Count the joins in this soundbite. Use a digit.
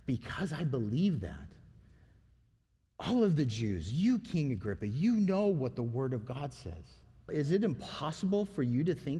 1